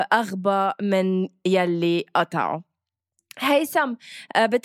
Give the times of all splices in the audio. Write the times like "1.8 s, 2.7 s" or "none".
none

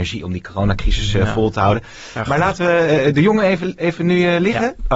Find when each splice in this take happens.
none

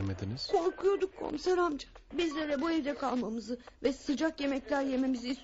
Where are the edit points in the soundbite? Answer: 2.1 s

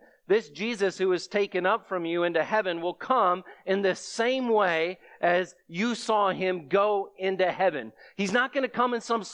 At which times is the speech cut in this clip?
none

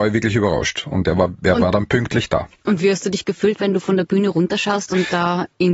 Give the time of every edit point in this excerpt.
2.6 s

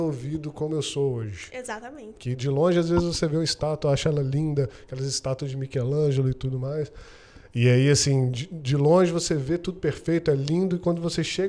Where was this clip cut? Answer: 2.2 s

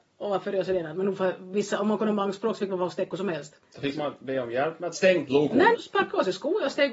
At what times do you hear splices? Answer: 5.7 s

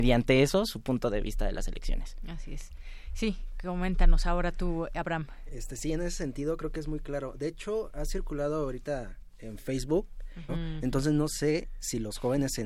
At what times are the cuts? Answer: 10.5 s

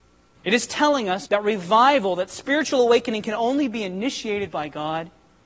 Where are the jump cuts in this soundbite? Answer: 1.2 s

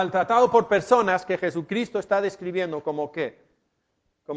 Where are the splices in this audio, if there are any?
none

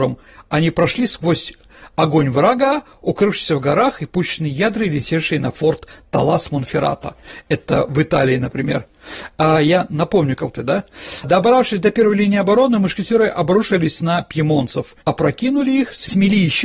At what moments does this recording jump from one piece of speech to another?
10.5 s, 15.0 s

